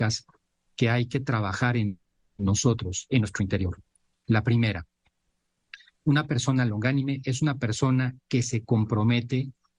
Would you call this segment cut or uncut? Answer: uncut